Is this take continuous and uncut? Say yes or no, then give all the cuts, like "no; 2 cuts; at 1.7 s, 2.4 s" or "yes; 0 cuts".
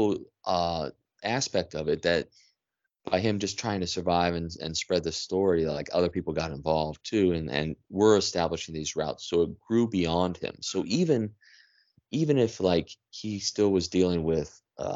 yes; 0 cuts